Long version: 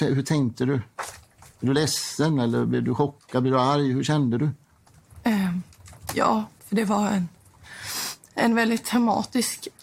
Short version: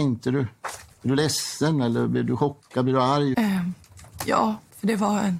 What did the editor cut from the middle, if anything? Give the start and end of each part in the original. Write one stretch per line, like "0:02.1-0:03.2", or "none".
0:01.2-0:01.5
0:03.9-0:05.2